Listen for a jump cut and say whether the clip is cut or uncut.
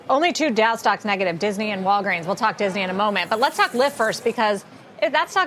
uncut